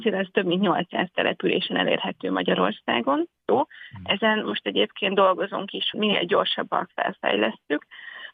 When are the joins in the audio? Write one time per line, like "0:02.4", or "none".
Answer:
0:03.5
0:05.9